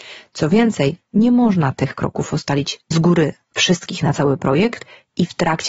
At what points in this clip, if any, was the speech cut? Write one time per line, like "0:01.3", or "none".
0:02.8